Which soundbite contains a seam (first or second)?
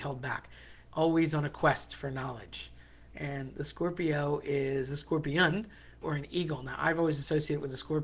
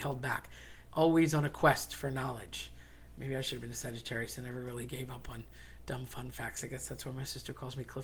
first